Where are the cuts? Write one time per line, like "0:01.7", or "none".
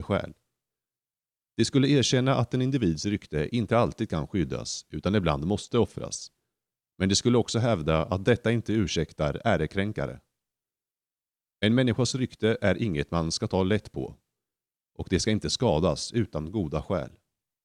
none